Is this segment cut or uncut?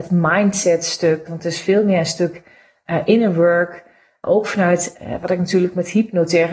cut